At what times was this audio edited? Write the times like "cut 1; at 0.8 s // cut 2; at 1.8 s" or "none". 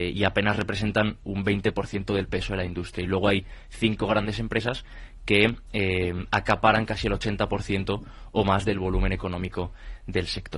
none